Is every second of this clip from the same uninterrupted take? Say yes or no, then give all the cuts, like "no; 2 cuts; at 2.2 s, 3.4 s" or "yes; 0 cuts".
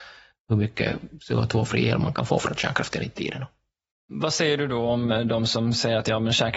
yes; 0 cuts